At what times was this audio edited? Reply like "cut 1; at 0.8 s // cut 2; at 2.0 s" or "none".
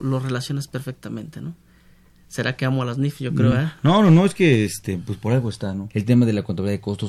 cut 1; at 5.9 s